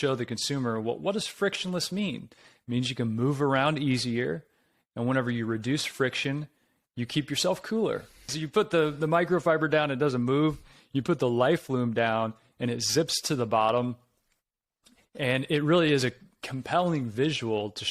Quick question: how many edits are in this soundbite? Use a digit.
1